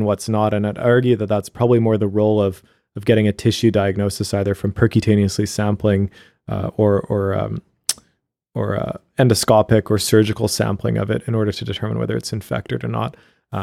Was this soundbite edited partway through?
no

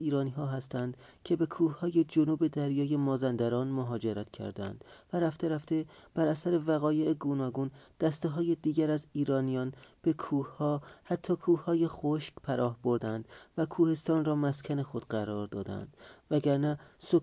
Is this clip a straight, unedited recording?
yes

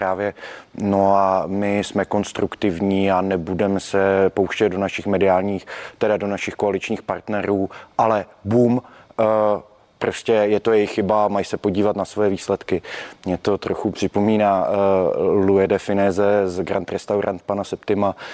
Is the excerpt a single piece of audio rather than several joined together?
yes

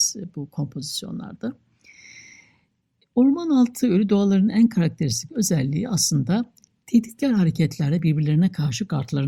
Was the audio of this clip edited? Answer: no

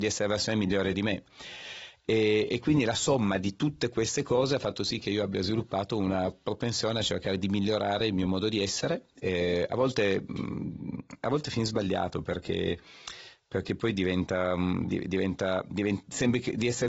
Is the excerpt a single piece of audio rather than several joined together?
yes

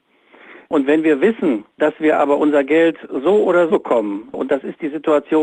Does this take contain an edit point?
yes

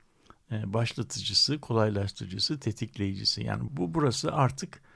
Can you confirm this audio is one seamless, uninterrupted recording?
no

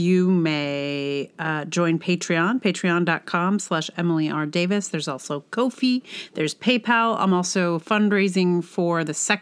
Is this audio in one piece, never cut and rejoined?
yes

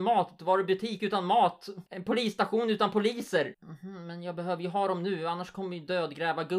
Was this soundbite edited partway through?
yes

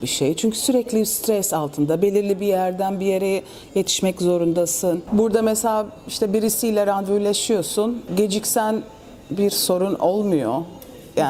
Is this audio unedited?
yes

